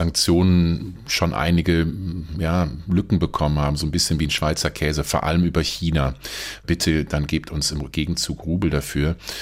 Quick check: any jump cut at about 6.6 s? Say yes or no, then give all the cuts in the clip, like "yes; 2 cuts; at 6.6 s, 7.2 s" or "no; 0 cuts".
yes; 1 cut; at 6.6 s